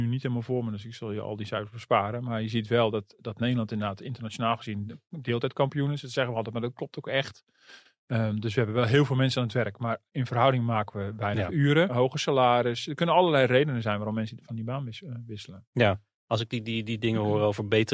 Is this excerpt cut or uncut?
cut